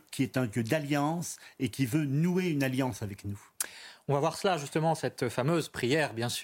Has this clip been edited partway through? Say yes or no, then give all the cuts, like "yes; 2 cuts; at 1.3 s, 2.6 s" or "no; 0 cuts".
no; 0 cuts